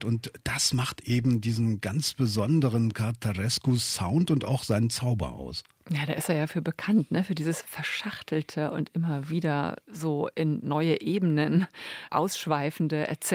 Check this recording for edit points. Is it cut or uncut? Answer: uncut